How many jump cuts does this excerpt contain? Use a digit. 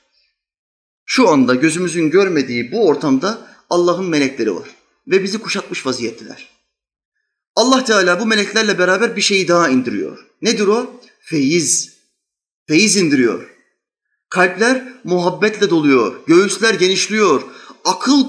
0